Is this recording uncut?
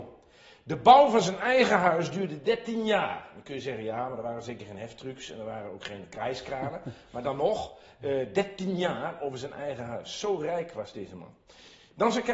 yes; 0 cuts

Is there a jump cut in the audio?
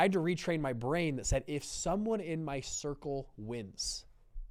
no; 0 cuts

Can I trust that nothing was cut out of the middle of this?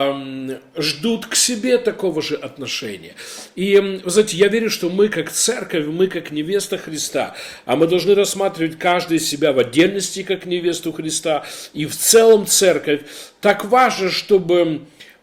yes; 0 cuts

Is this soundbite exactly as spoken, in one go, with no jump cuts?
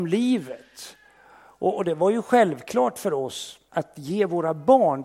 no; 1 cut; at 3.7 s

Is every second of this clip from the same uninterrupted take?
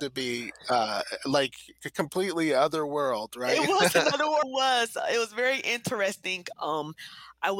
no; 2 cuts; at 4.4 s, 6.5 s

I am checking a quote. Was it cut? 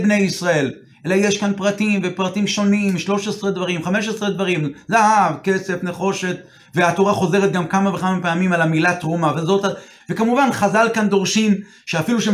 yes; 1 cut; at 10.0 s

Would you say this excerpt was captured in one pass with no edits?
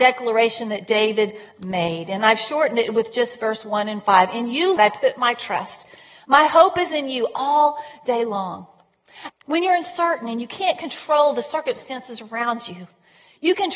no; 2 cuts; at 4.8 s, 9.3 s

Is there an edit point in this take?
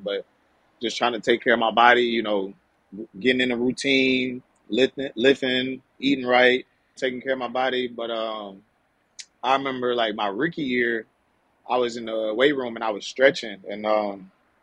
yes; 1 cut; at 7.0 s

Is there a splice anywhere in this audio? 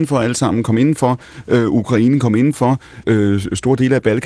yes; 1 cut; at 3.0 s

